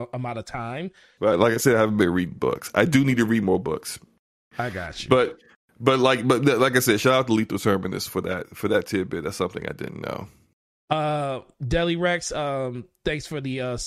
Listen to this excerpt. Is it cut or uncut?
cut